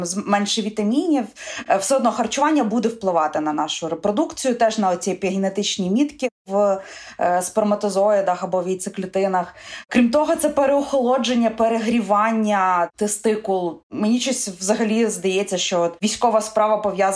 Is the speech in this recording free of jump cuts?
no; 2 cuts; at 9.8 s, 13.8 s

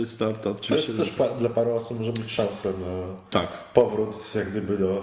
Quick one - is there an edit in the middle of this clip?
no; 0 cuts

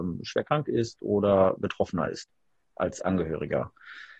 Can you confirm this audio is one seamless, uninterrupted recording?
yes; 0 cuts

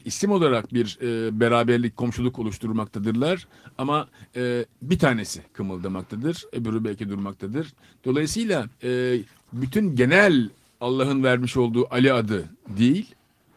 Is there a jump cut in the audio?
yes; 1 cut; at 8.7 s

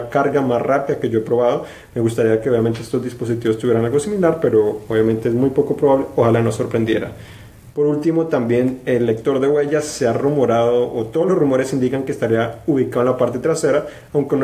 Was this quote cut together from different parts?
no; 0 cuts

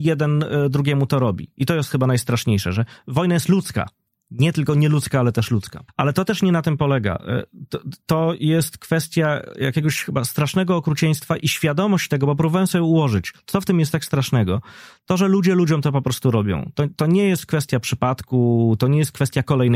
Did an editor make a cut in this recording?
yes; 1 cut; at 5.9 s

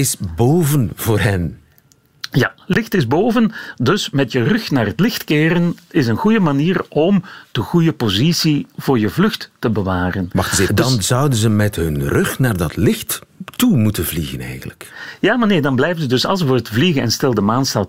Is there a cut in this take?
yes; 1 cut; at 10.7 s

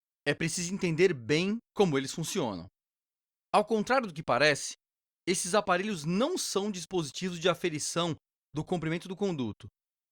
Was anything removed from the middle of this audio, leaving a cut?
no; 0 cuts

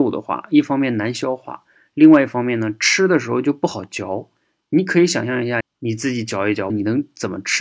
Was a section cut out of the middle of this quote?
yes; 2 cuts; at 5.6 s, 6.7 s

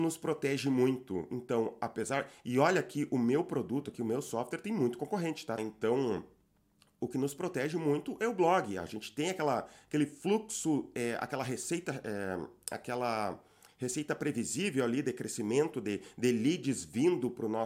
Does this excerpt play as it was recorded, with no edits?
no; 1 cut; at 5.6 s

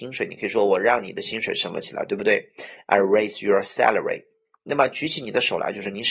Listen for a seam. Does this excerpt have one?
no; 0 cuts

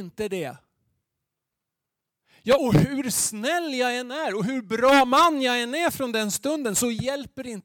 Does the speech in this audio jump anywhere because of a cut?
yes; 1 cut; at 2.6 s

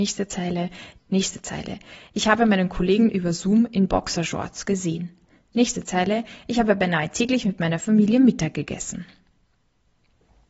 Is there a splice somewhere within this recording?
yes; 1 cut; at 1.0 s

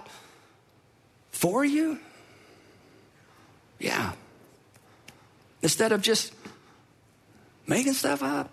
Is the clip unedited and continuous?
yes; 0 cuts

